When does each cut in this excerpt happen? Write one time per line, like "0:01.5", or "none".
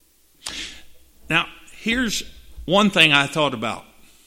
none